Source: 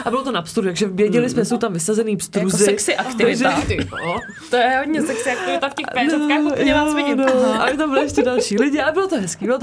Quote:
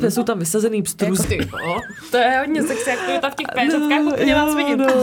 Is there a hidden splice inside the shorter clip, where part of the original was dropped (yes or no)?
yes